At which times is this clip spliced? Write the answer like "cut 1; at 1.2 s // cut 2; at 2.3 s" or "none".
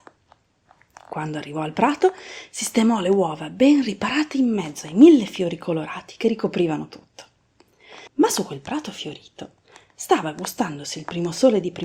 cut 1; at 8.1 s